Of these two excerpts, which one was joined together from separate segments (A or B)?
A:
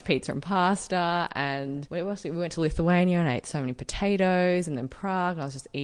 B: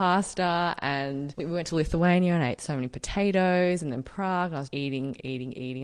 B